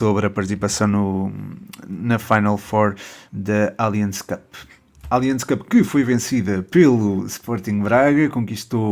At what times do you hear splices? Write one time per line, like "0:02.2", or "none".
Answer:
none

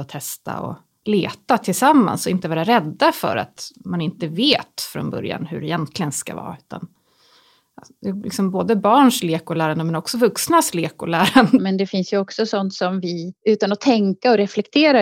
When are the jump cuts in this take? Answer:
0:11.6
0:13.4

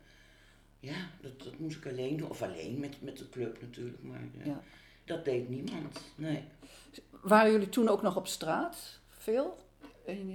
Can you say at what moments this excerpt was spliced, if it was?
none

